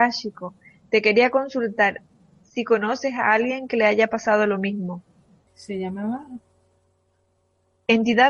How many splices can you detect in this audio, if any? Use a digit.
1